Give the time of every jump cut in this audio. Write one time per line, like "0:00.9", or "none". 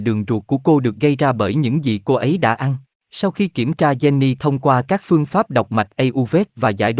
0:02.9